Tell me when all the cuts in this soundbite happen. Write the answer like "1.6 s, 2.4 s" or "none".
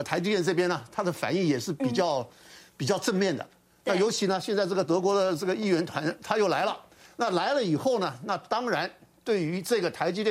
none